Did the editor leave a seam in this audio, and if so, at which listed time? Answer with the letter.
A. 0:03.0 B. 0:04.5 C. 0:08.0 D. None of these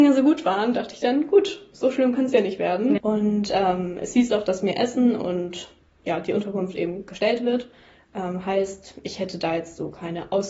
A